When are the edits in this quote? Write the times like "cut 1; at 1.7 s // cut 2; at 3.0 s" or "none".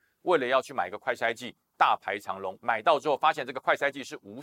cut 1; at 2.6 s